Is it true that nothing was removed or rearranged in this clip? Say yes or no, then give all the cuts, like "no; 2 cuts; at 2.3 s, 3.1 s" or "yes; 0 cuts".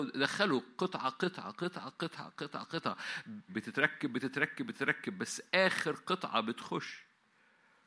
no; 2 cuts; at 1.9 s, 3.5 s